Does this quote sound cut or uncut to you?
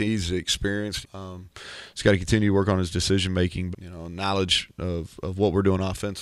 cut